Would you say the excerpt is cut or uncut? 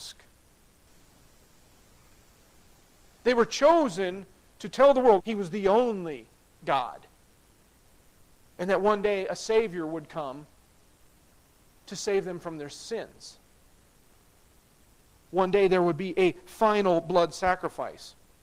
cut